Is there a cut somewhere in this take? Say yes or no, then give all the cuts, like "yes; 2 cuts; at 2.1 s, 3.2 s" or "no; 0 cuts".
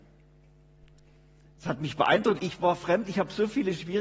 yes; 1 cut; at 2.4 s